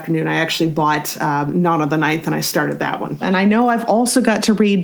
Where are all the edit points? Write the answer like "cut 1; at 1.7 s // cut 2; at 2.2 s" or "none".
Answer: cut 1; at 3.2 s